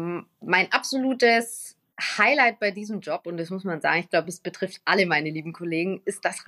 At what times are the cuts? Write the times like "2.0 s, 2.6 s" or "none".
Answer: none

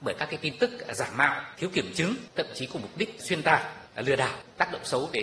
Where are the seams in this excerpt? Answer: none

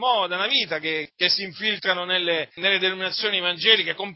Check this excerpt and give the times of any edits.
1.1 s, 2.6 s

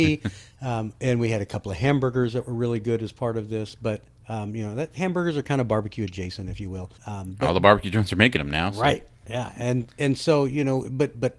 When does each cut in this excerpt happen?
7.0 s

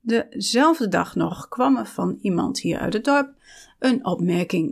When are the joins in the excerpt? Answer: none

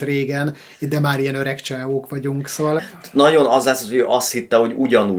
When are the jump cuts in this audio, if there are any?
2.8 s

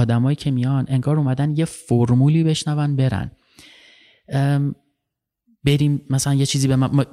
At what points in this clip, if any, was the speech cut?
none

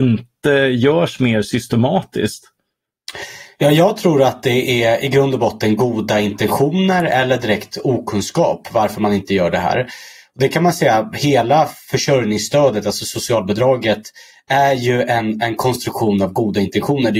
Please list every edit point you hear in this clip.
none

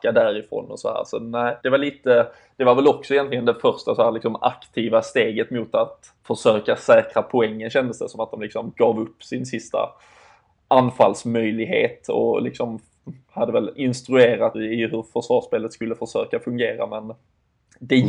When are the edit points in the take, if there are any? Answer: 1.6 s, 6.2 s, 14.5 s

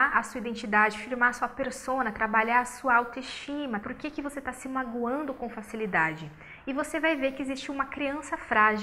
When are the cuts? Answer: 3.8 s

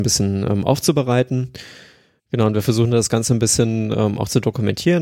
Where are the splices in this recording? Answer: 2.2 s

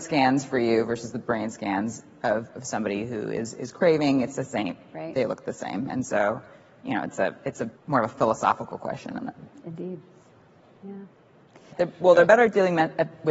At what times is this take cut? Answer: 7.8 s, 11.7 s

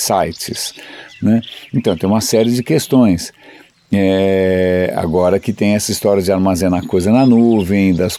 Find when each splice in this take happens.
none

